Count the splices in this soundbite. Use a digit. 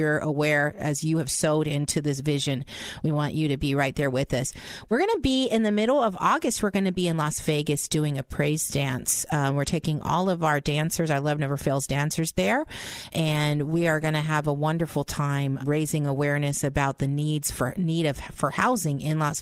2